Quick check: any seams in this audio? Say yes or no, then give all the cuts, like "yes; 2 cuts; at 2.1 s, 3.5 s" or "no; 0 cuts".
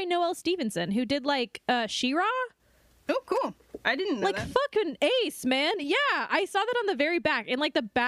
no; 0 cuts